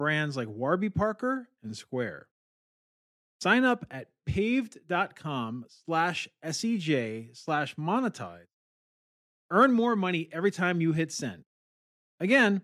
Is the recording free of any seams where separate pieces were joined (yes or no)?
yes